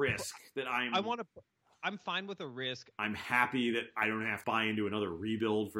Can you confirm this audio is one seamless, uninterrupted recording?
no; 2 cuts; at 2.9 s, 4.4 s

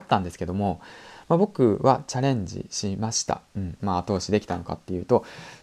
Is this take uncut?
no; 1 cut; at 3.8 s

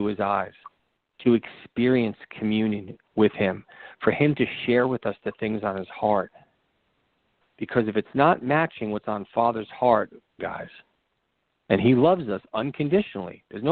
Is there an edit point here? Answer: yes; 2 cuts; at 7.4 s, 10.4 s

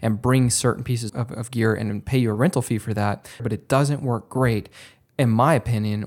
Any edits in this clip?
yes; 2 cuts; at 1.1 s, 3.4 s

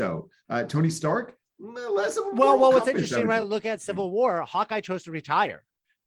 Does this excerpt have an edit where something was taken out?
no; 0 cuts

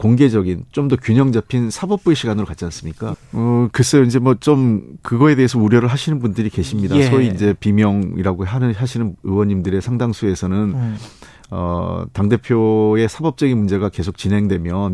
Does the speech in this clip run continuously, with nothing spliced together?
no; 1 cut; at 3.1 s

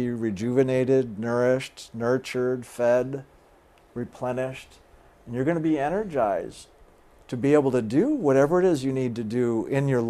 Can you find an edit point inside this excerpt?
no; 0 cuts

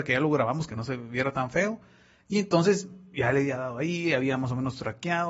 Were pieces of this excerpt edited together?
no; 0 cuts

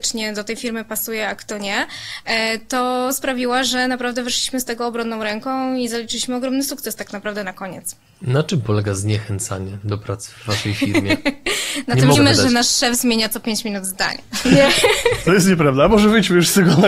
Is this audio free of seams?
no; 2 cuts; at 12.1 s, 14.4 s

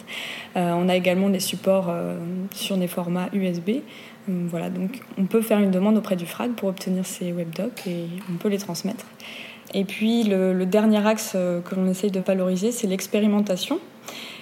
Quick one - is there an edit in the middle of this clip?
no; 0 cuts

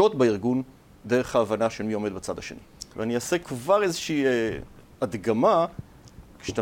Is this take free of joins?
no; 1 cut; at 2.9 s

